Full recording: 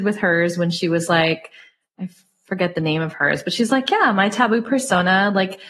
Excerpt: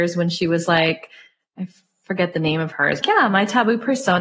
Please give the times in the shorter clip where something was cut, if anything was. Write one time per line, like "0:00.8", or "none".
0:03.0